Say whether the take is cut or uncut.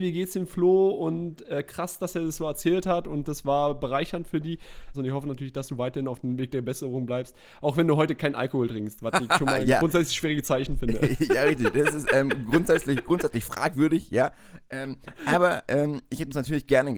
cut